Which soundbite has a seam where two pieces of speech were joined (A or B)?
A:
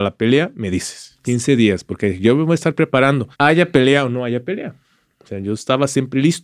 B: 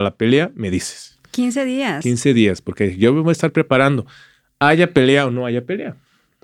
A